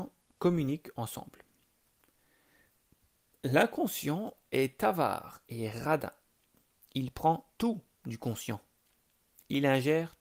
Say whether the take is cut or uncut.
uncut